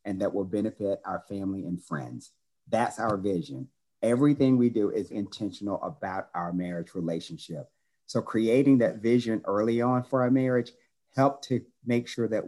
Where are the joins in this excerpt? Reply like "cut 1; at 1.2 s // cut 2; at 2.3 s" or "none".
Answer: cut 1; at 5.1 s